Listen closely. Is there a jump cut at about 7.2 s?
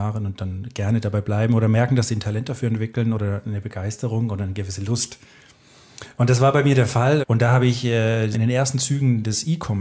yes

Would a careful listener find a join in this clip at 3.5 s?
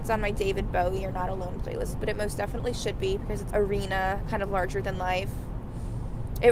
yes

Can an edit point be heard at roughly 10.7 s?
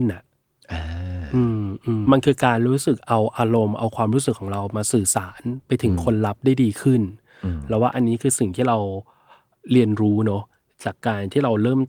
no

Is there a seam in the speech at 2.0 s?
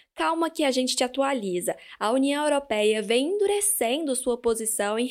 no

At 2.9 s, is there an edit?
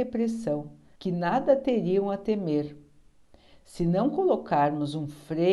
no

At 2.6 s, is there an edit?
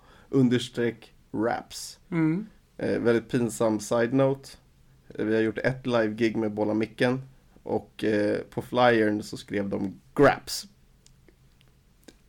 no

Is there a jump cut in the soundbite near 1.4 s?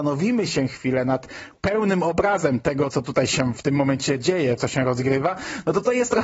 no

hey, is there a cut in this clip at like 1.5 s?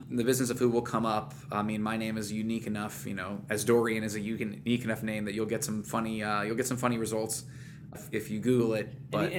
no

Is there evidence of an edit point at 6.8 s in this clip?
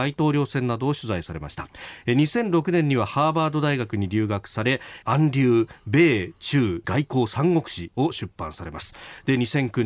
yes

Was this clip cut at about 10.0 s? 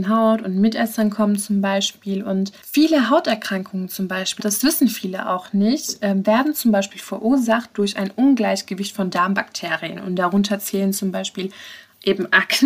no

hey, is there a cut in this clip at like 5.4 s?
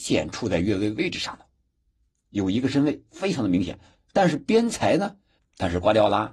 yes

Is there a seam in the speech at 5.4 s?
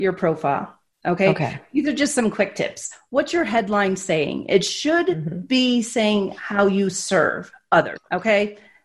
no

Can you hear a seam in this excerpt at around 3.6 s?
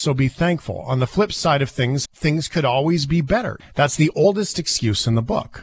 yes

